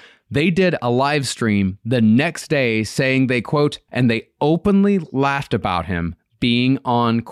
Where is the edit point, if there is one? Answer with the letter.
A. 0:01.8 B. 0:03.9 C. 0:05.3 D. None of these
B